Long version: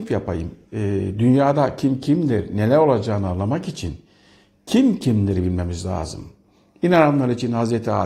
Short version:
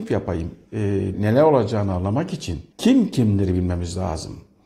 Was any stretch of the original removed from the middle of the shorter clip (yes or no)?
yes